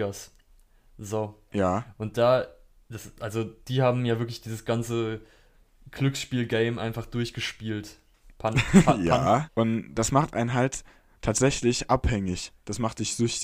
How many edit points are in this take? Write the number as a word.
one